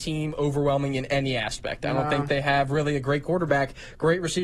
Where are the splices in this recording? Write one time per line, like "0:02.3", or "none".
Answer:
none